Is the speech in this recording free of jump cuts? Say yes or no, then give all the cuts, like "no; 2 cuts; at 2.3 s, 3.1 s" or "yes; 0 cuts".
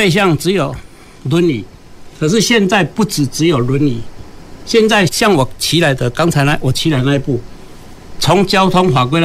no; 1 cut; at 5.1 s